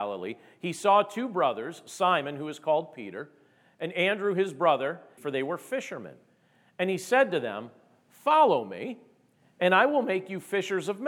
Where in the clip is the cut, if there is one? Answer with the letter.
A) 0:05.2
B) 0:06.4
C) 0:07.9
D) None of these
A